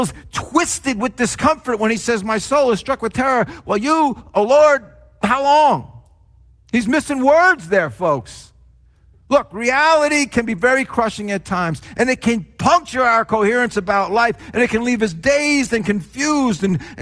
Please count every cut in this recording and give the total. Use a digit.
0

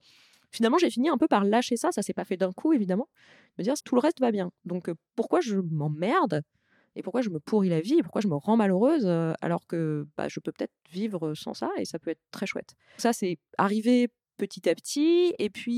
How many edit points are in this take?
2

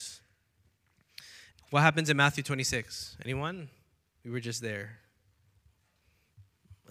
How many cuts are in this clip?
1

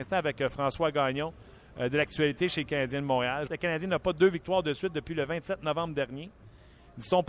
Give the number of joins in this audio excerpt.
1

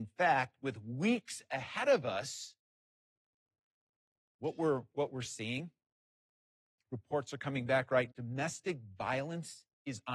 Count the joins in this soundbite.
1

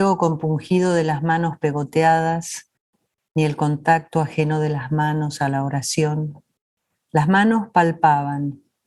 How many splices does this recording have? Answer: 1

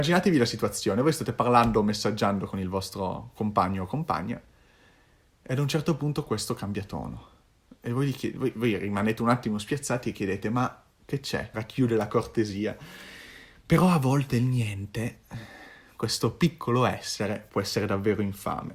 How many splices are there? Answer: 1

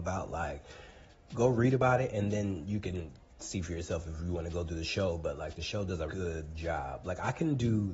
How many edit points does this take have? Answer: 1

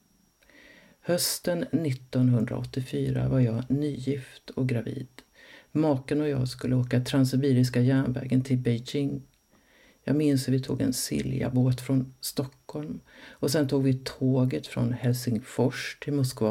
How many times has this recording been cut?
0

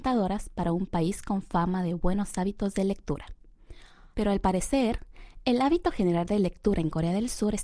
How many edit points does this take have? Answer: 1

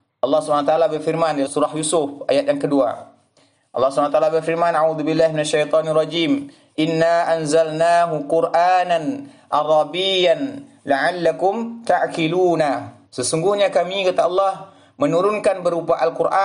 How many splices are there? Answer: 2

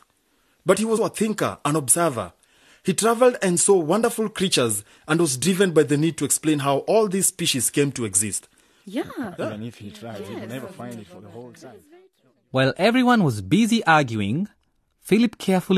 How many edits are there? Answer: 2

